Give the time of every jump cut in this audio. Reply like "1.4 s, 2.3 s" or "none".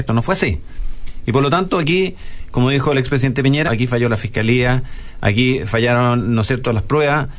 3.7 s